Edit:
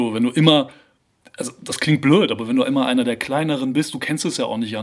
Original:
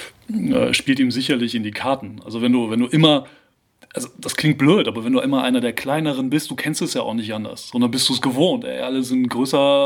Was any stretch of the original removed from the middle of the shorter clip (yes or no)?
no